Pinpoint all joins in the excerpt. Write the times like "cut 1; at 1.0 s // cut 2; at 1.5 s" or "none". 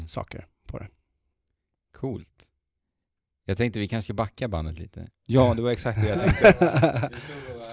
none